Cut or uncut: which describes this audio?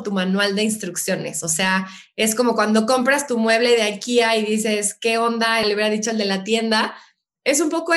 cut